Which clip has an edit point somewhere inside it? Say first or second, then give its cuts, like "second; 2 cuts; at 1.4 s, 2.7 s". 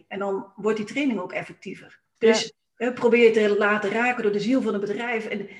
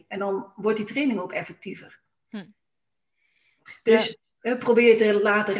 first; 1 cut; at 2.2 s